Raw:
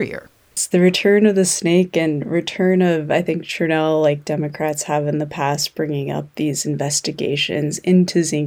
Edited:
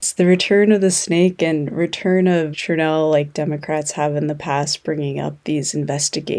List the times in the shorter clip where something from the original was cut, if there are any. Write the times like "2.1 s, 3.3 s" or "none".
2.5 s